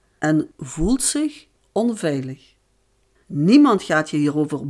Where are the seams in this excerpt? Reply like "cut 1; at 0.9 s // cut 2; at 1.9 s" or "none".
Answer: cut 1; at 3.2 s